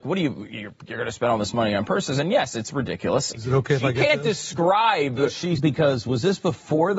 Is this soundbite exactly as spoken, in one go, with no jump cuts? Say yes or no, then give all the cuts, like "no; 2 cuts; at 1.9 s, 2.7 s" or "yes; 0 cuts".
no; 2 cuts; at 3.3 s, 5.6 s